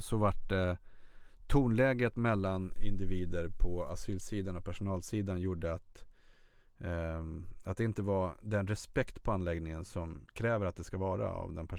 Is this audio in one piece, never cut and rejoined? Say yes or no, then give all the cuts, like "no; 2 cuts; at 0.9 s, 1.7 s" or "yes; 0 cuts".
no; 1 cut; at 10.3 s